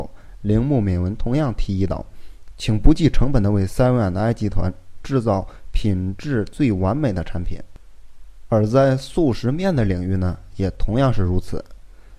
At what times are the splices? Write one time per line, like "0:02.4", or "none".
0:08.5